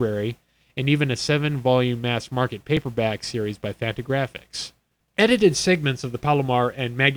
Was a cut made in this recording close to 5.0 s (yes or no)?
no